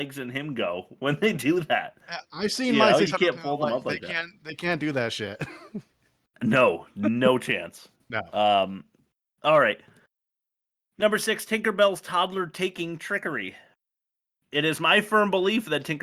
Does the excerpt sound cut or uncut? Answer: uncut